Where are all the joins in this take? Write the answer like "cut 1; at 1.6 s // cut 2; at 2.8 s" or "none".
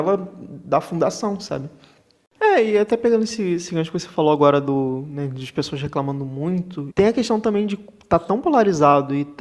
cut 1; at 2.4 s // cut 2; at 6.9 s